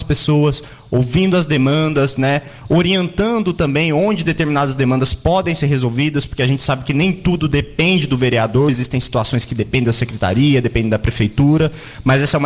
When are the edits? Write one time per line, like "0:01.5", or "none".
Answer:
none